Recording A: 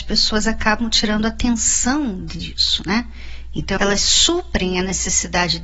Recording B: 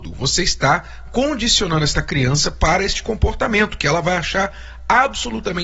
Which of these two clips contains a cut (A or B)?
A